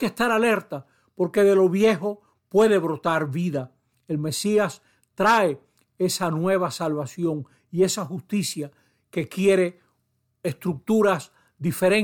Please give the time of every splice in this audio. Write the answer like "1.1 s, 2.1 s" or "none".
3.9 s